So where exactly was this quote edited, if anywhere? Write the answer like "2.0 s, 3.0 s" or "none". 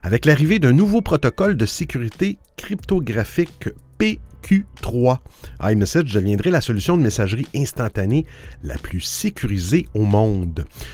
none